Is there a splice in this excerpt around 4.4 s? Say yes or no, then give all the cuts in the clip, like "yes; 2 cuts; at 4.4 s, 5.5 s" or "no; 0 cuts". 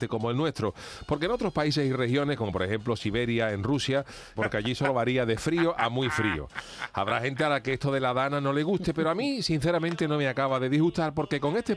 yes; 1 cut; at 4.4 s